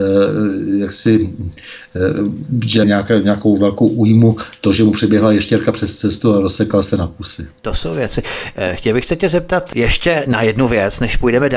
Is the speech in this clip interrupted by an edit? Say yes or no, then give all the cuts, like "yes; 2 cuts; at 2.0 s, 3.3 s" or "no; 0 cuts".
yes; 1 cut; at 2.8 s